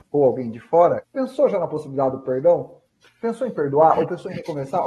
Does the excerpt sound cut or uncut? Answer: cut